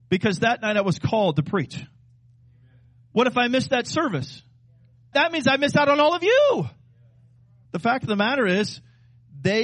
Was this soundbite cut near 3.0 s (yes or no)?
no